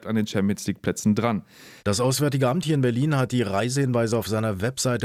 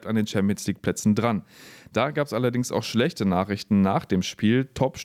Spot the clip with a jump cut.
first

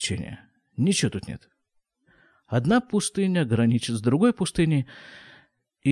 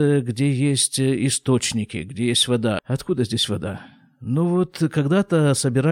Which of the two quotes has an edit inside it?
second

